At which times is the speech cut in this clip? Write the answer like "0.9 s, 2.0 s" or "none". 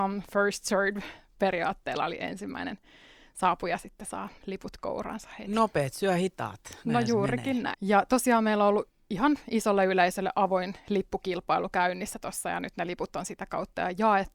7.7 s

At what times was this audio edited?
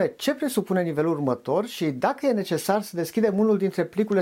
none

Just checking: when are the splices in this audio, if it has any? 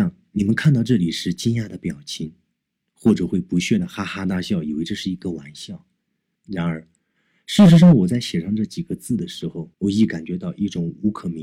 6.4 s, 9.7 s

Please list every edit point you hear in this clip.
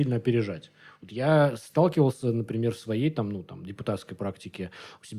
none

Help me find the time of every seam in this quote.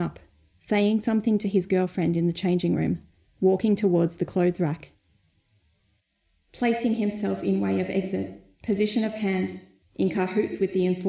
9.8 s

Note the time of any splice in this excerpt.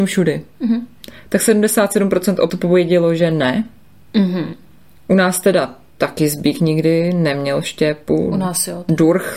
none

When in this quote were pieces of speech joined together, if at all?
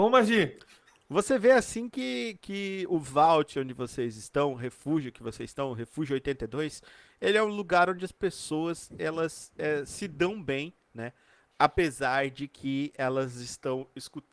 none

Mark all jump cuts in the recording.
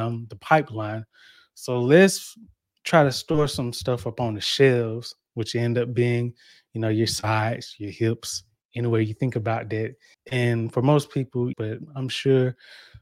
10.1 s, 11.5 s

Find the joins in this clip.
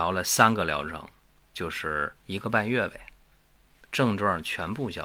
2.2 s

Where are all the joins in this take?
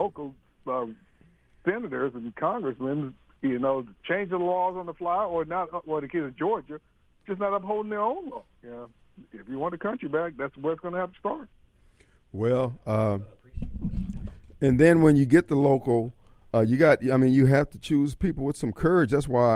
8.6 s

